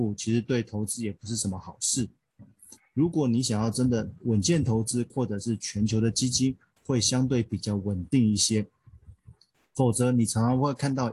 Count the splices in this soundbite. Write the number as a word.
two